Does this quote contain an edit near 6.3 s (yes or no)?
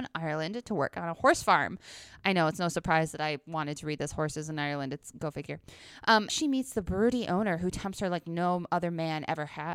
yes